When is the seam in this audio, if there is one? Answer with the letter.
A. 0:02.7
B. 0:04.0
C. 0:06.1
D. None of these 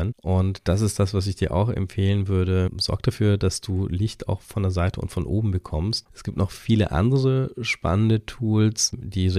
C